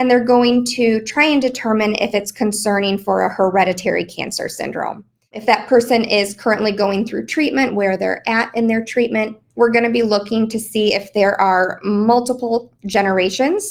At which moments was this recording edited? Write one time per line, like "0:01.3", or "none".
0:07.7
0:09.5